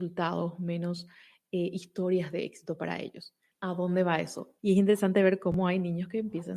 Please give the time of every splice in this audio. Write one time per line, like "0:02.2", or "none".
0:03.5
0:04.6